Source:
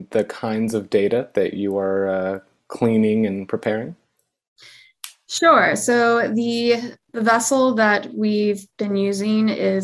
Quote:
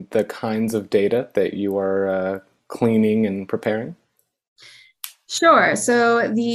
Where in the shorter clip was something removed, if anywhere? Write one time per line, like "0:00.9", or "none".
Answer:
none